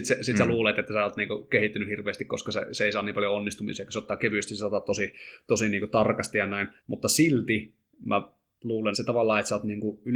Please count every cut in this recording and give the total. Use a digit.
2